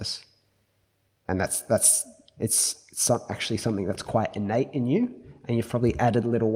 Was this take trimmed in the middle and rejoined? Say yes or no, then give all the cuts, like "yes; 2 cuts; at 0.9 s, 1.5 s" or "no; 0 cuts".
no; 0 cuts